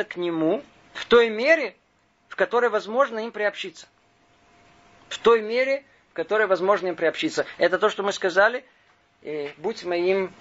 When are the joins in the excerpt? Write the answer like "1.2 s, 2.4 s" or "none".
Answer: none